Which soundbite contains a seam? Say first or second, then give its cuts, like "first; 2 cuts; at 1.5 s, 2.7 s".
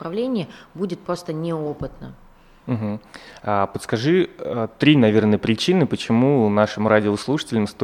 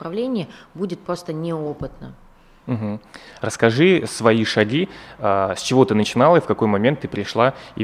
second; 1 cut; at 3.4 s